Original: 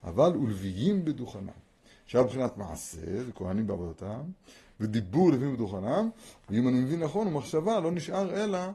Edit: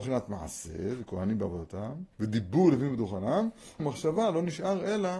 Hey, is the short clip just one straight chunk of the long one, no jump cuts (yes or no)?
no